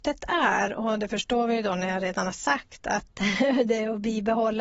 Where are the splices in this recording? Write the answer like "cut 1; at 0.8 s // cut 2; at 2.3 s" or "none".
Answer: none